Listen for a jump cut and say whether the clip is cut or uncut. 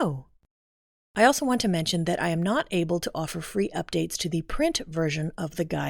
cut